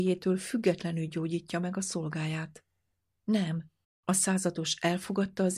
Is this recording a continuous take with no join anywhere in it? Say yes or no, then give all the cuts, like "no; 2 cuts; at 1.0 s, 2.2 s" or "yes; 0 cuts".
no; 1 cut; at 3.8 s